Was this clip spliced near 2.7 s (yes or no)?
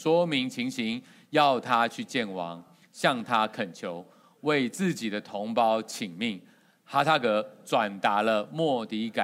no